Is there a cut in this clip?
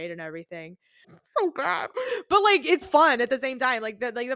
yes; 2 cuts; at 1.0 s, 2.8 s

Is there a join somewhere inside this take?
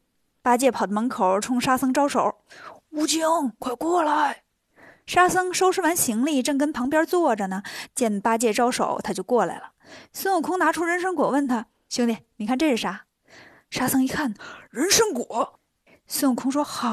no; 0 cuts

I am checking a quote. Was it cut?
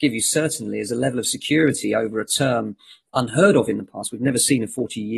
no; 0 cuts

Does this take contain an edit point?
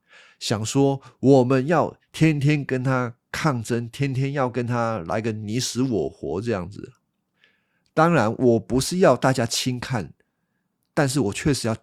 no; 0 cuts

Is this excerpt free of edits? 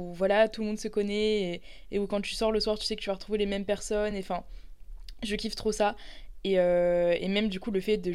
yes; 0 cuts

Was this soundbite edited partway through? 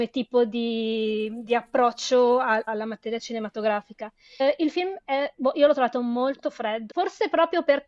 yes; 3 cuts; at 2.7 s, 4.4 s, 6.9 s

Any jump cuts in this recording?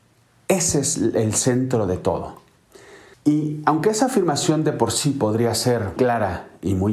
yes; 2 cuts; at 3.1 s, 6.0 s

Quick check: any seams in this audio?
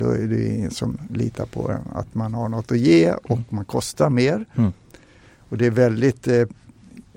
no; 0 cuts

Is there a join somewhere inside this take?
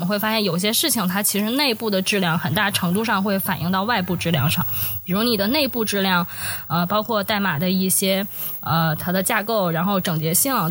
no; 0 cuts

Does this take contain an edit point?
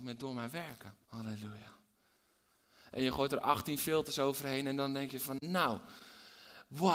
yes; 2 cuts; at 1.0 s, 2.9 s

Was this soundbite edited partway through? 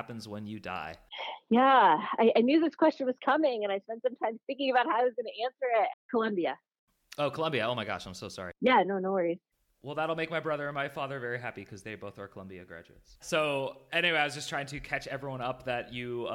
yes; 2 cuts; at 5.9 s, 13.2 s

